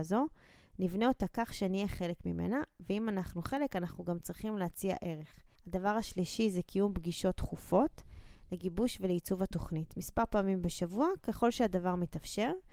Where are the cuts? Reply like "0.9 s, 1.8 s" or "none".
5.6 s